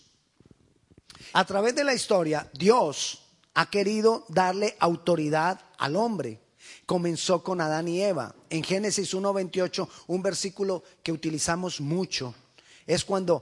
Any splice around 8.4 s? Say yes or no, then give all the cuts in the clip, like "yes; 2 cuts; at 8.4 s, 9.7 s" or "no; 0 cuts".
no; 1 cut; at 1.3 s